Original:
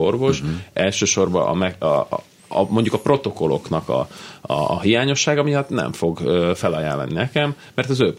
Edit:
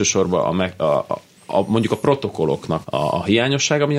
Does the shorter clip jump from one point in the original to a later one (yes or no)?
yes